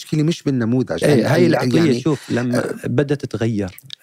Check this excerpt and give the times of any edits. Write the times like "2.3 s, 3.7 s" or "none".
1.0 s